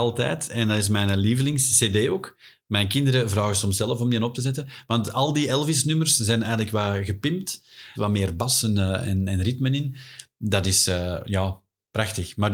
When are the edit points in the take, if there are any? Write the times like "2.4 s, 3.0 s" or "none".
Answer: 8.0 s